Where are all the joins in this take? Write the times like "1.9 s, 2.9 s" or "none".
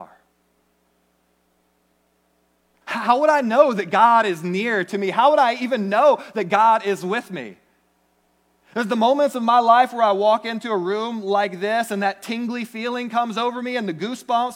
2.8 s

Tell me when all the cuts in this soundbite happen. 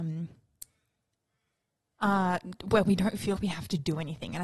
3.4 s

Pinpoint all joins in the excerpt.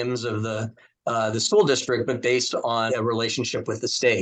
2.9 s

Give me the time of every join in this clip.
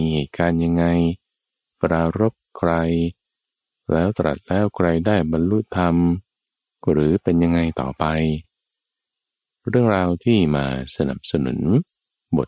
none

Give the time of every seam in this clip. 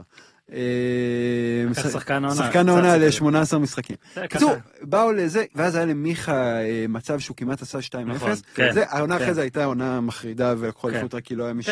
5.5 s, 8.5 s

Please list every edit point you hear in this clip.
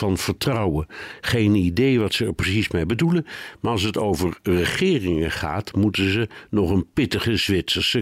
none

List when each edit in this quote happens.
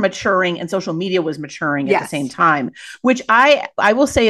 none

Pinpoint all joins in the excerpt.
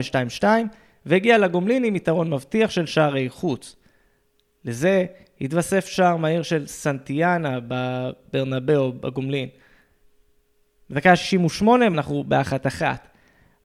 11.9 s

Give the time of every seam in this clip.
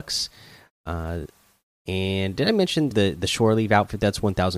2.9 s

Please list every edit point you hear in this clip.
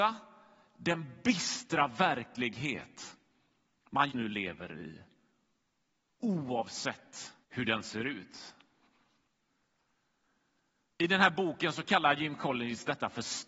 4.1 s, 7.4 s

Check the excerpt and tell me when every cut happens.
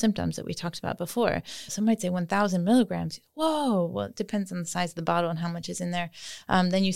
1.7 s

